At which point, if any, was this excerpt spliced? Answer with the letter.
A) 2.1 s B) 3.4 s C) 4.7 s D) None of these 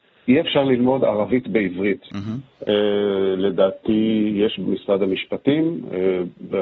A